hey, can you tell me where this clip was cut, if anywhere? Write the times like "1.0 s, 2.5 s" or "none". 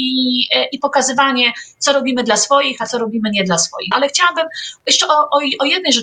3.9 s

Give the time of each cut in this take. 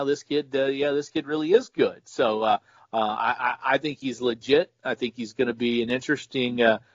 none

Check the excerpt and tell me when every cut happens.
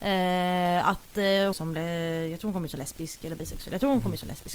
1.5 s

